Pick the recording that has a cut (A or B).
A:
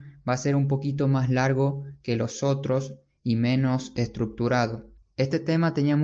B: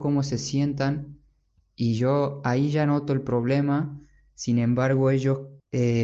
A